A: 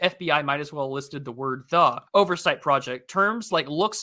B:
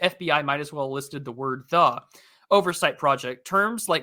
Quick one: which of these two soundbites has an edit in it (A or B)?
A